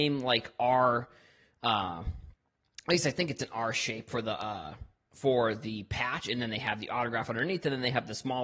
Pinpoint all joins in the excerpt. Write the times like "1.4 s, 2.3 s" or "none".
none